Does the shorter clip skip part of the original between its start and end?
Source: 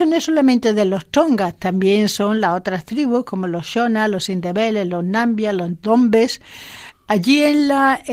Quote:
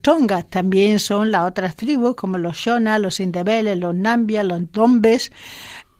no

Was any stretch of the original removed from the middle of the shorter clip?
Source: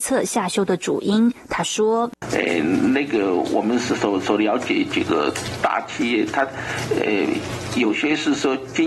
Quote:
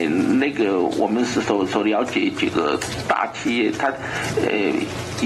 no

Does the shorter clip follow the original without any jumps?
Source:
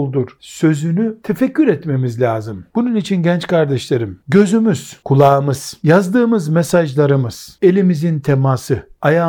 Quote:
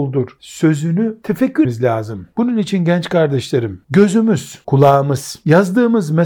no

